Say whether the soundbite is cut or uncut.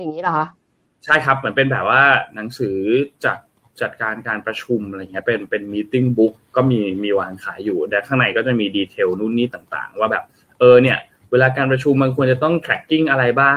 uncut